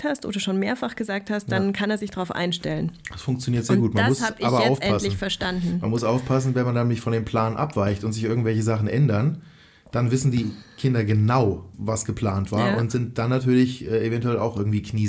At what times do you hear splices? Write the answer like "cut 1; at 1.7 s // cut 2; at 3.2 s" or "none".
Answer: none